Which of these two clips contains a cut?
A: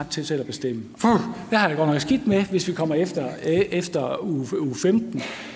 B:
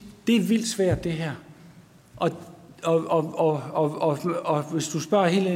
A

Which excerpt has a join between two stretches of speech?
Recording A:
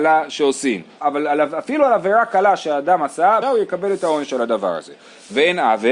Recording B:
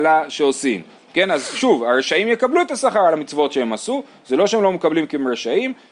A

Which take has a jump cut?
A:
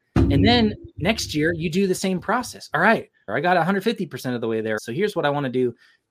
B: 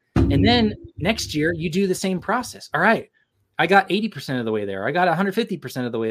A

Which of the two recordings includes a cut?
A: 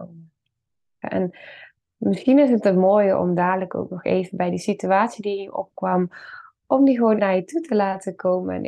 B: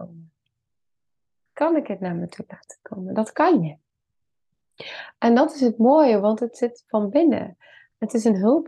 A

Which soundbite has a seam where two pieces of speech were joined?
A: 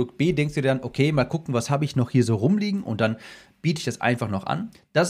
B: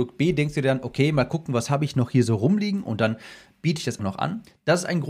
B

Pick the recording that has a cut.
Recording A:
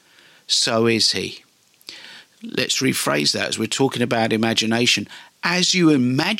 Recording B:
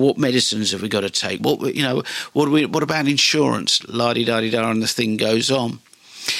B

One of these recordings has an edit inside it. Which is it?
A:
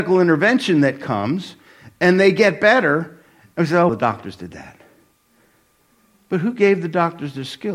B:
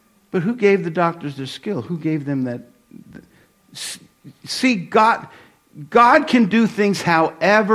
A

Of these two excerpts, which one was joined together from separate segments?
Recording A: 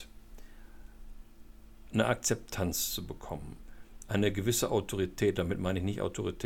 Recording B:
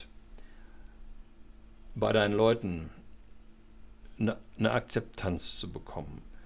A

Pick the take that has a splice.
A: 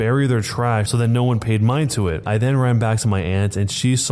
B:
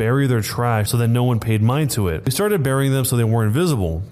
A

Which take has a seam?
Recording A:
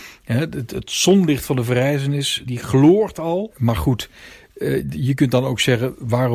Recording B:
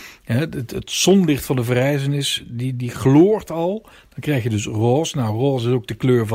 A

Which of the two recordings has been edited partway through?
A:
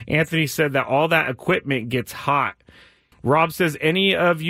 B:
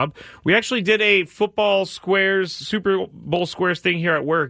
A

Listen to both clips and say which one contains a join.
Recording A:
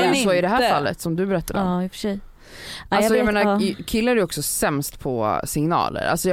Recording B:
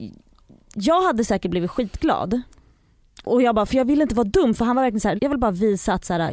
B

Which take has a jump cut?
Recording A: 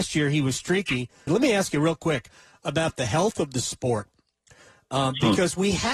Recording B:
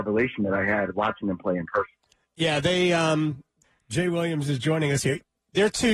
A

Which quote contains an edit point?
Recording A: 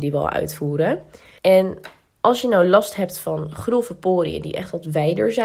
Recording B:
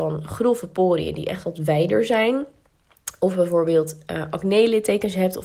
A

